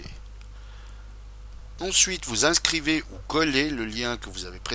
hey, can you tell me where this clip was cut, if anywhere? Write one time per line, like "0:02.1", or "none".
none